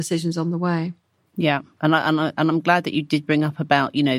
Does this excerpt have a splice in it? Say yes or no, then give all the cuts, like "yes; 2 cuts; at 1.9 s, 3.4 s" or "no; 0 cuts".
no; 0 cuts